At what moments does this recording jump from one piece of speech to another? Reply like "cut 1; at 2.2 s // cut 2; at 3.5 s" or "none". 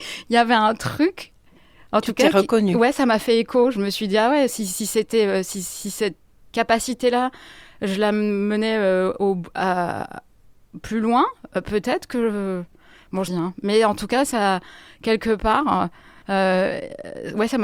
cut 1; at 6.5 s // cut 2; at 13.3 s // cut 3; at 16.2 s